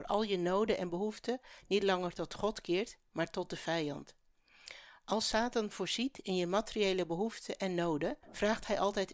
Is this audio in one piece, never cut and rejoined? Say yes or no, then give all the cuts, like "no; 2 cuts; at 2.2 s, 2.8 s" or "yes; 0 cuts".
no; 1 cut; at 8.2 s